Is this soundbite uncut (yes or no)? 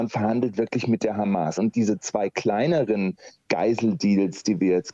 no